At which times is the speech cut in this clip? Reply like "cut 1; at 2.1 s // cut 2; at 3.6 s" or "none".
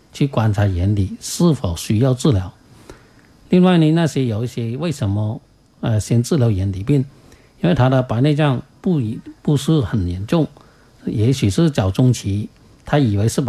none